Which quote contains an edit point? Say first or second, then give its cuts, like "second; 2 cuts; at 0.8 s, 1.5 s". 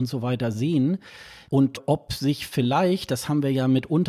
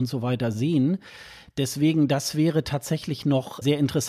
first; 1 cut; at 1.5 s